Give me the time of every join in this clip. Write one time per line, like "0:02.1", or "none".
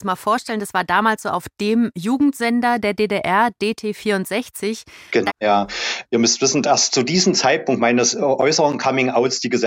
0:05.3
0:06.6